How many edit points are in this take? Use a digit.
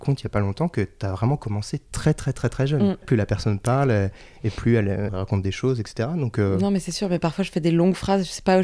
2